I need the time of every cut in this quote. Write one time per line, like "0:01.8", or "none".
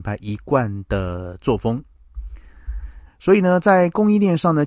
0:03.1